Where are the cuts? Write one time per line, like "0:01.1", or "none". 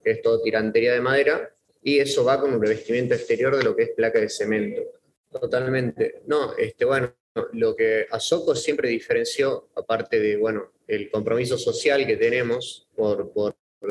0:05.1